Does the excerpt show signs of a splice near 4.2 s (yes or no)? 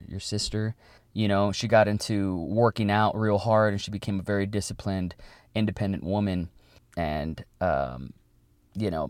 no